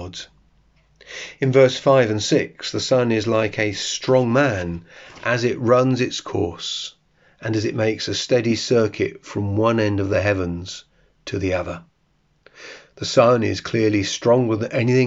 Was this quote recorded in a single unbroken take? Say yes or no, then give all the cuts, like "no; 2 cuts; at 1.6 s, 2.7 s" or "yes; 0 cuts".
yes; 0 cuts